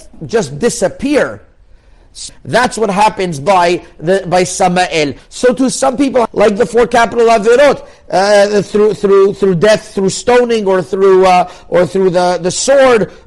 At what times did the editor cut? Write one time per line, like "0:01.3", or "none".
0:02.3
0:05.2
0:06.3